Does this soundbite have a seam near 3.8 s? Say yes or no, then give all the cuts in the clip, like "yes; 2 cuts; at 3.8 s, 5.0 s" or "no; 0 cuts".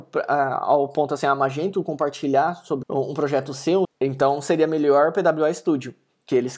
yes; 2 cuts; at 2.8 s, 3.8 s